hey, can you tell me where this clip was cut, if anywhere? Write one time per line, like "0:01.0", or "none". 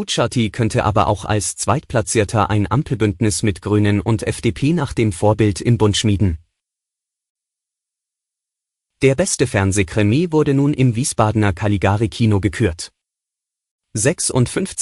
none